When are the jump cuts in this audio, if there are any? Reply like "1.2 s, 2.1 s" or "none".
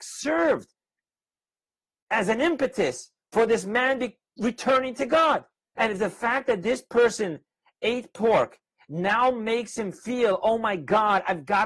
5.8 s